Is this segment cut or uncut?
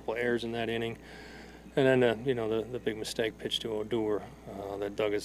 uncut